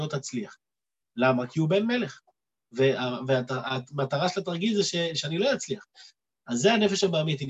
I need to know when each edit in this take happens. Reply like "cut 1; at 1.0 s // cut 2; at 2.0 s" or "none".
cut 1; at 1.0 s